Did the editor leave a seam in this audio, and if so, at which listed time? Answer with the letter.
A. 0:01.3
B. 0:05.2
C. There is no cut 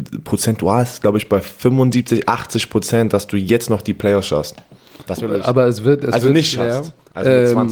B